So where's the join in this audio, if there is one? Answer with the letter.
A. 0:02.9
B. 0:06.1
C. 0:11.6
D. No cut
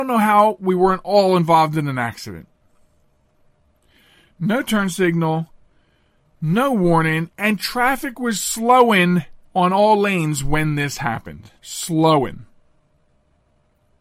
C